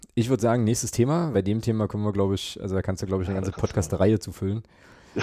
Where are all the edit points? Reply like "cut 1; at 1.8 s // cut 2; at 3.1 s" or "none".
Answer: cut 1; at 1.3 s